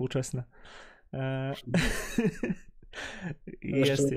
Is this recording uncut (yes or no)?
yes